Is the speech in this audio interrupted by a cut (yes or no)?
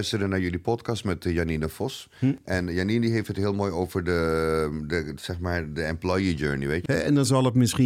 yes